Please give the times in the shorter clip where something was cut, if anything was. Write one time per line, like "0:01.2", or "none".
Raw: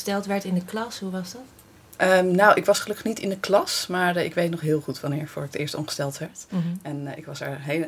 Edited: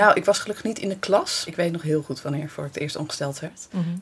0:01.5